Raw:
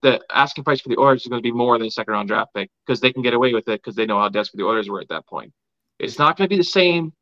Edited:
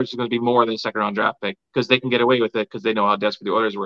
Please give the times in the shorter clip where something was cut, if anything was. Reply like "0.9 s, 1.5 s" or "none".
none